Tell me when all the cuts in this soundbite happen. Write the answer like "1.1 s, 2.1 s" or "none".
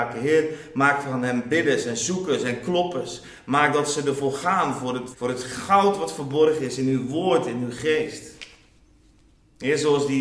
5.1 s